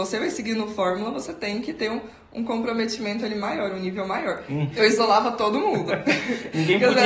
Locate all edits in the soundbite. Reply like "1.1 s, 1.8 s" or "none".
4.7 s